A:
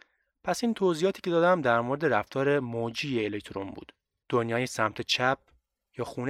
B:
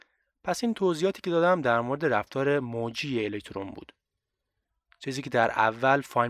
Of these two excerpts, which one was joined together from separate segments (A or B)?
A